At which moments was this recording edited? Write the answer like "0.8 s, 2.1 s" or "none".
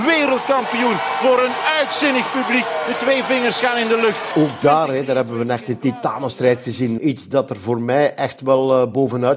4.3 s, 7.0 s